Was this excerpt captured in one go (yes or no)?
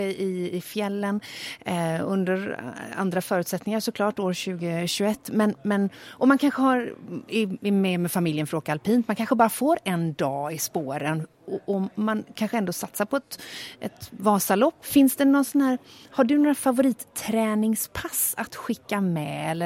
no